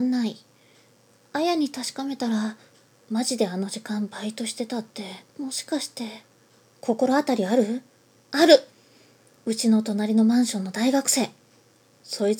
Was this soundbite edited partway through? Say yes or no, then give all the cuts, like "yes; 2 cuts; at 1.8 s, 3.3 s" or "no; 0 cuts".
yes; 1 cut; at 5.3 s